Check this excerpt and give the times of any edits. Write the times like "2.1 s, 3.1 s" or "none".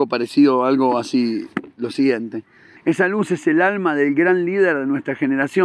2.8 s